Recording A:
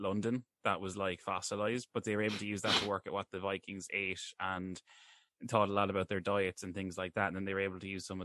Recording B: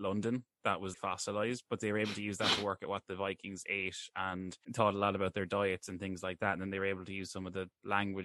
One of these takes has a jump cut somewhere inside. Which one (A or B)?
B